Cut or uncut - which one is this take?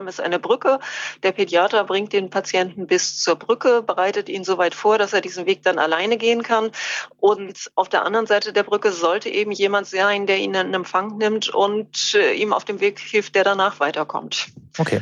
uncut